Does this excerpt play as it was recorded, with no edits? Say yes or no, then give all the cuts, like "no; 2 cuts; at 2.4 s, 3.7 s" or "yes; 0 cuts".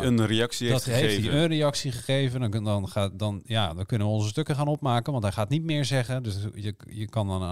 yes; 0 cuts